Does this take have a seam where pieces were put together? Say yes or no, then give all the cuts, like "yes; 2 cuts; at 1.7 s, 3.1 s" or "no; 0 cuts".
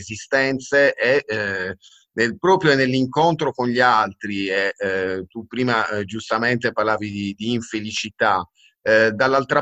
no; 0 cuts